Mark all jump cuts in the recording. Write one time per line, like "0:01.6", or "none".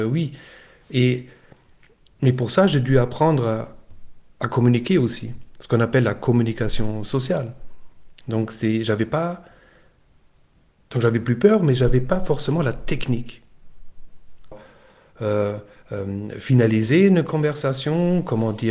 0:14.5